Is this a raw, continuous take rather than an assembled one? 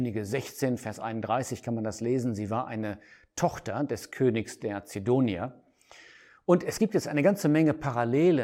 yes; 0 cuts

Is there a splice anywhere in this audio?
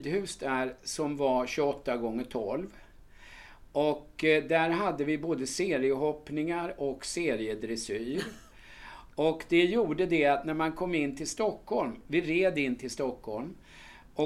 no; 0 cuts

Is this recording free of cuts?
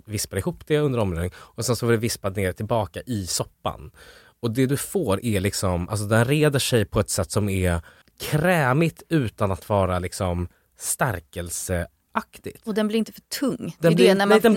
no; 1 cut; at 8.0 s

